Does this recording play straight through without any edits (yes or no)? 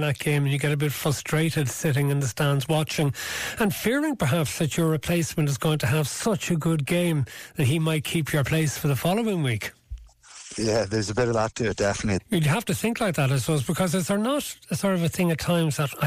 no